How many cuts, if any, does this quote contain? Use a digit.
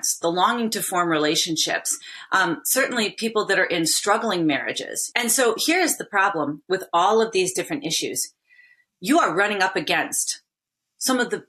1